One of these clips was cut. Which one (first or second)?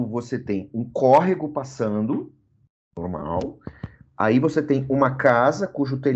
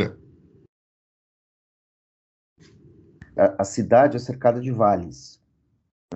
second